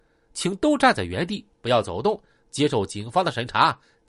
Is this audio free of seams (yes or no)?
yes